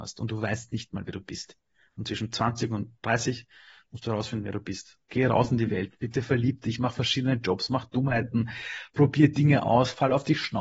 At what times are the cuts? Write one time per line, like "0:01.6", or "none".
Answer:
none